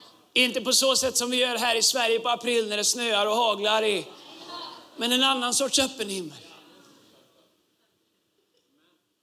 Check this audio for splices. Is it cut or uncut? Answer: uncut